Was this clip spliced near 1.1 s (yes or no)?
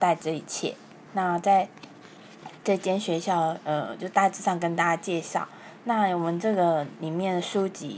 yes